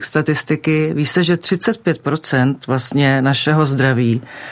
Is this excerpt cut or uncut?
uncut